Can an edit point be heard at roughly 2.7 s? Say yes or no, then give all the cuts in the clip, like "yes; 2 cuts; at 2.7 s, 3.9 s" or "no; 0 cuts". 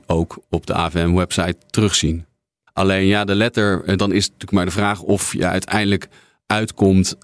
yes; 2 cuts; at 2.7 s, 4.0 s